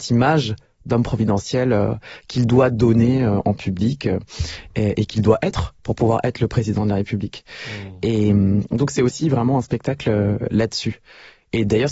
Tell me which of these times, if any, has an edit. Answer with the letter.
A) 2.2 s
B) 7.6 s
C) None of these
C